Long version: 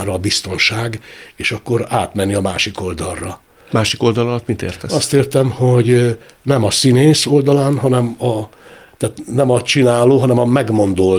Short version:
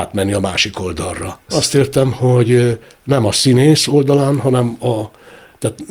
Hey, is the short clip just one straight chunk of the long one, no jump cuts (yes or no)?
no